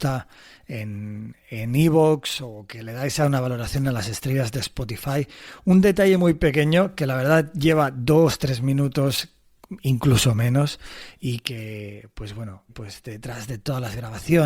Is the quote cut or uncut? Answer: cut